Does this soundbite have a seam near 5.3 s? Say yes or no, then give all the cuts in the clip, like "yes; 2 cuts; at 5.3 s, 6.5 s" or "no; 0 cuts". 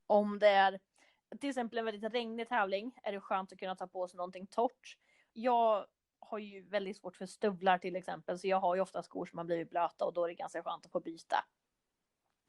yes; 1 cut; at 5.3 s